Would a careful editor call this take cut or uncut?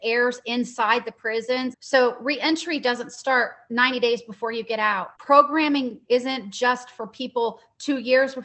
cut